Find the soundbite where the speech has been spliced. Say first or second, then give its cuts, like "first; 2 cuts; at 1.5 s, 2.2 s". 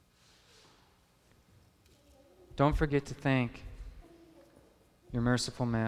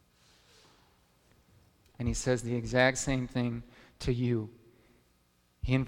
second; 1 cut; at 1.9 s